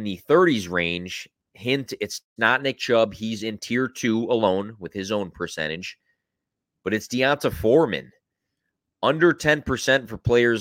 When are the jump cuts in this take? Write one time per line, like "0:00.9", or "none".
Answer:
none